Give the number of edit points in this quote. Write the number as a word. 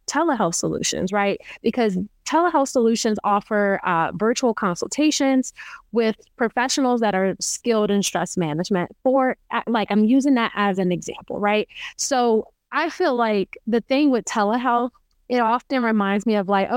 zero